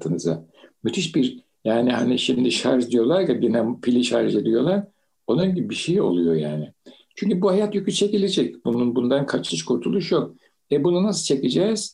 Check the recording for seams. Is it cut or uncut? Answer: uncut